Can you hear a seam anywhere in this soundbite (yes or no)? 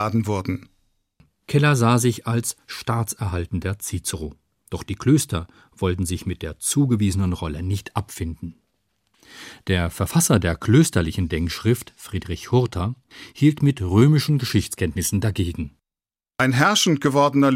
no